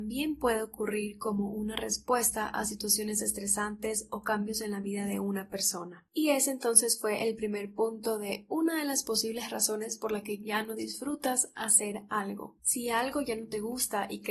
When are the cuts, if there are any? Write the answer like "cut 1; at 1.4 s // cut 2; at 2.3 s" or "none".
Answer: cut 1; at 12.6 s

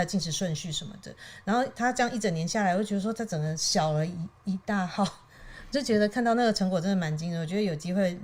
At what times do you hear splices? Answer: none

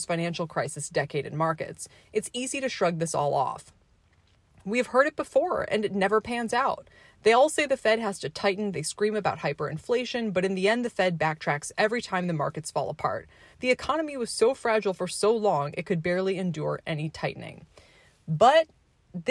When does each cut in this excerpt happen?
cut 1; at 13.5 s

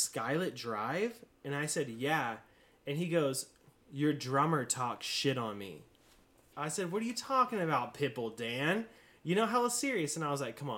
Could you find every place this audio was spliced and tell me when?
cut 1; at 6.5 s

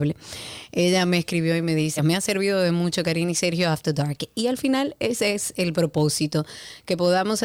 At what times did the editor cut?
cut 1; at 2.0 s

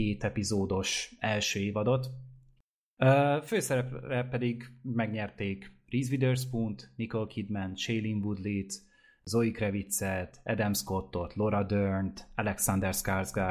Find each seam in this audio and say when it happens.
cut 1; at 3.0 s

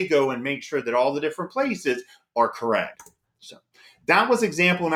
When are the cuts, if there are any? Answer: none

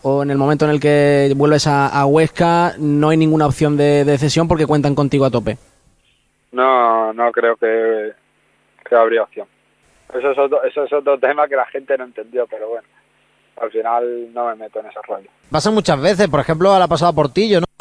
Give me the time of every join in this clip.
cut 1; at 15.5 s

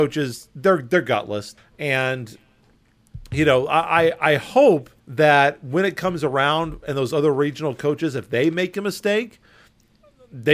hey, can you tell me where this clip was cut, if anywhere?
cut 1; at 1.6 s // cut 2; at 5.0 s

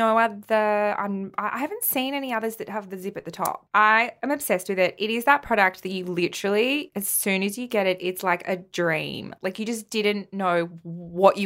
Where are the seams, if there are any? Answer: none

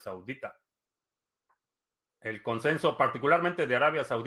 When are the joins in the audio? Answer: cut 1; at 2.1 s

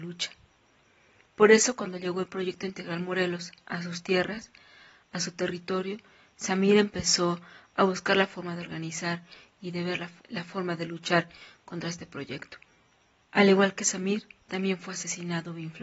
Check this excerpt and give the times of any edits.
cut 1; at 10.2 s // cut 2; at 13.2 s

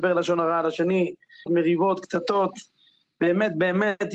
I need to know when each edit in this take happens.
cut 1; at 1.5 s

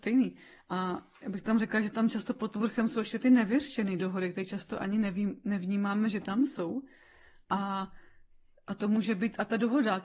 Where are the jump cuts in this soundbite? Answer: none

